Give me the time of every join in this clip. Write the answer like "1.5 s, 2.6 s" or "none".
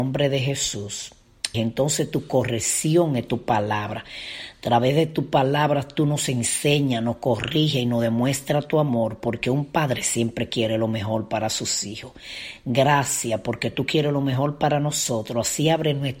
1.5 s